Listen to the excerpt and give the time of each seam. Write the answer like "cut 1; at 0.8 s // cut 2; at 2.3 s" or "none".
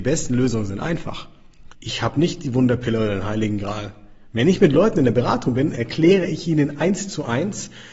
cut 1; at 1.7 s